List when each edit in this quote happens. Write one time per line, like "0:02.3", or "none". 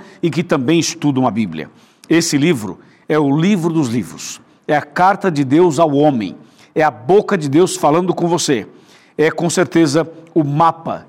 none